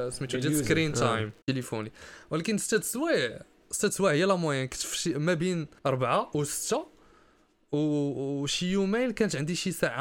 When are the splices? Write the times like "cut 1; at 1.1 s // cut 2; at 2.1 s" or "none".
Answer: cut 1; at 1.4 s // cut 2; at 5.8 s